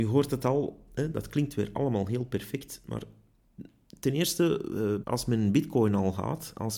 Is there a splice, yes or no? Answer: yes